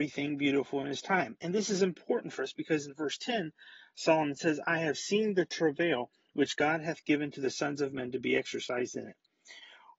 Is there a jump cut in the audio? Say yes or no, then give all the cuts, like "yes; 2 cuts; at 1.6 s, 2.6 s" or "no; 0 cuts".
no; 0 cuts